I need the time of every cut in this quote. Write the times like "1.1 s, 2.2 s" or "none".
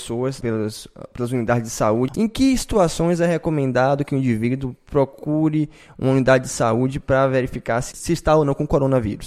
none